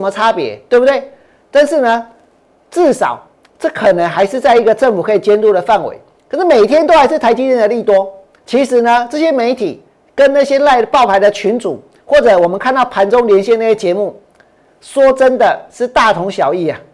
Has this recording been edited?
yes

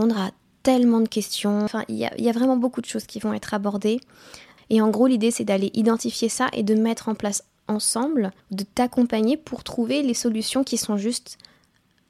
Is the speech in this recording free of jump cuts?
no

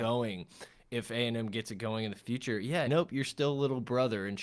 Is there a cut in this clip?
yes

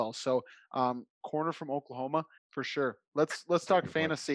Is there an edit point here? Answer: yes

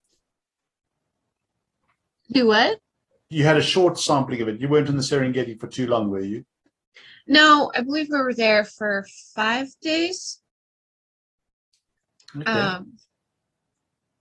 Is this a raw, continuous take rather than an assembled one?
no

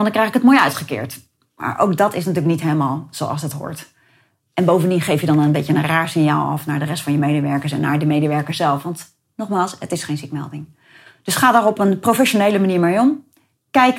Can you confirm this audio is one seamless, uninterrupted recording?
yes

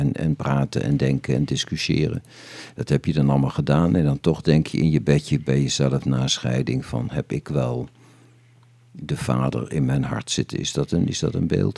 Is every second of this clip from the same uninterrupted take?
yes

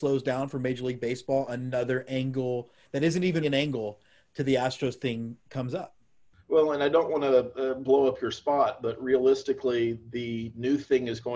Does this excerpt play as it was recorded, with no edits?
no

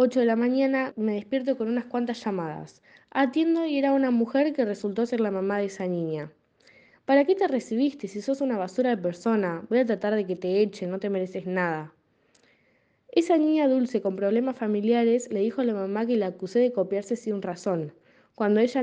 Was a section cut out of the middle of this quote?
yes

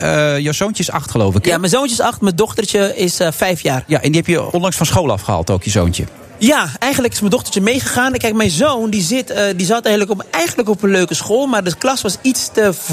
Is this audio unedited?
yes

